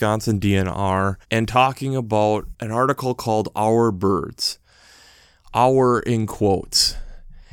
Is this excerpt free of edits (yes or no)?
no